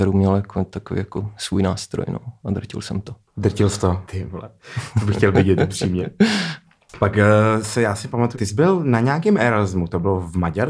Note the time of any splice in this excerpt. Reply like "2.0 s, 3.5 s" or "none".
4.1 s, 8.3 s